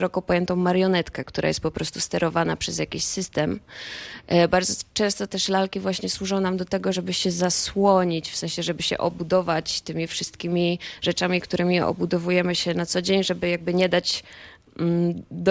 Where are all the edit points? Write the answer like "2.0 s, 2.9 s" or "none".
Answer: none